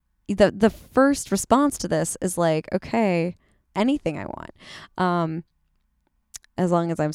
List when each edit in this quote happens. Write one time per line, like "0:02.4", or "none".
0:03.7